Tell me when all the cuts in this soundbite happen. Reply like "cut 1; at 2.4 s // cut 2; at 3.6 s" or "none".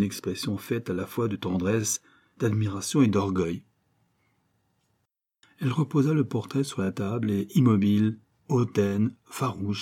none